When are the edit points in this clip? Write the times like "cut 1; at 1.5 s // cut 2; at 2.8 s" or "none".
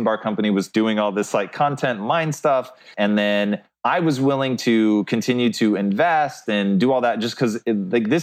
cut 1; at 2.9 s